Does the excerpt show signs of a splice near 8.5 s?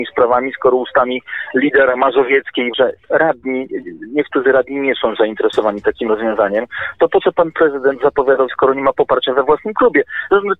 yes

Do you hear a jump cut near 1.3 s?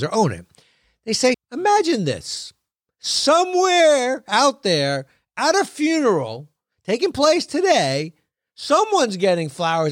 yes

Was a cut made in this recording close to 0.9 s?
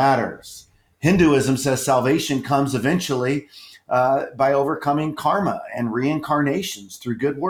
yes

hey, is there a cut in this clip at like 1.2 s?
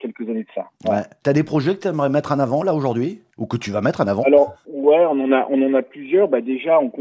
yes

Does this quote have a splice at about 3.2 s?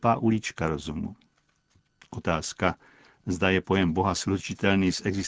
no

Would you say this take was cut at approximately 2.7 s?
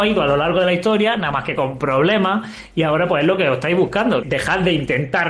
no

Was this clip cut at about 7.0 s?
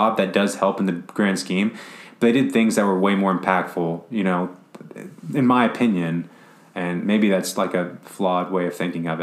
no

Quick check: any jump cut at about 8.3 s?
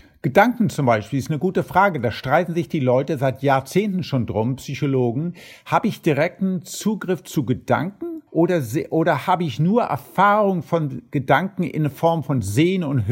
yes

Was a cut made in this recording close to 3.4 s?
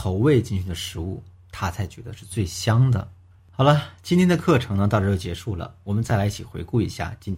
yes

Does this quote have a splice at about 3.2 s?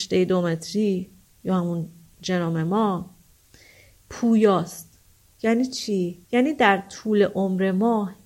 no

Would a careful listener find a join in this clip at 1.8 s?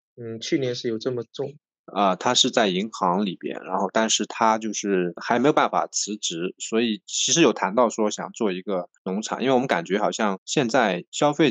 yes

